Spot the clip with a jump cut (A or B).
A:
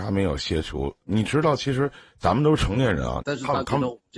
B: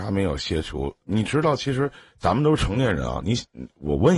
A